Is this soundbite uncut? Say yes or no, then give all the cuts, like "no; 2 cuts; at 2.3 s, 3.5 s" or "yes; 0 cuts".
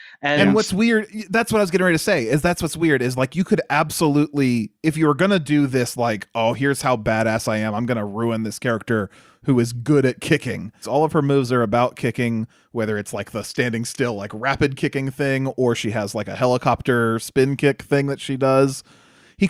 no; 1 cut; at 10.8 s